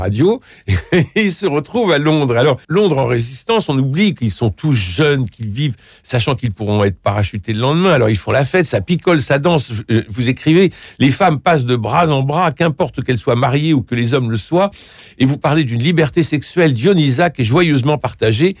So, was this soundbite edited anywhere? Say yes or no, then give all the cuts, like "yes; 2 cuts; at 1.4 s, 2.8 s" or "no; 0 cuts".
yes; 1 cut; at 2.6 s